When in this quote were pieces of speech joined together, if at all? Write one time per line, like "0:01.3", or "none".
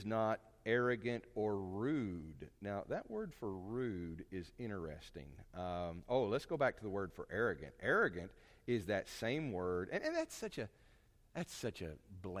none